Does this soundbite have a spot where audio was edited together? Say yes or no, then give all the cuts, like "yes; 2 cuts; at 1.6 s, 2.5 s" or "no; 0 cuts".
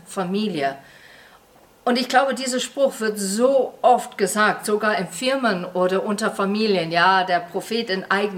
no; 0 cuts